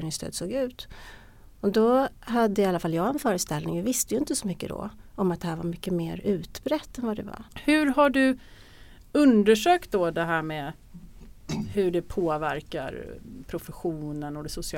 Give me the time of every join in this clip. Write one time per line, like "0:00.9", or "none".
0:07.5